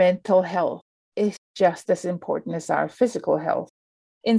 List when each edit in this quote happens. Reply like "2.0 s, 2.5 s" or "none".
none